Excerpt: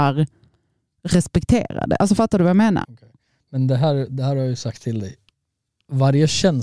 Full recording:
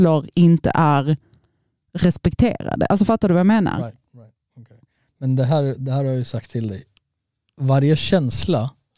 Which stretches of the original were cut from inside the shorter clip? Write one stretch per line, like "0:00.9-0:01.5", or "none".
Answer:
0:03.7-0:04.5